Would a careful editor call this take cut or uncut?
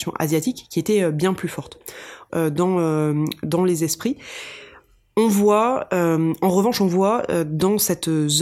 cut